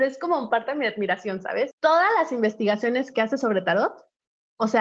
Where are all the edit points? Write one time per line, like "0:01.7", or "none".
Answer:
0:01.7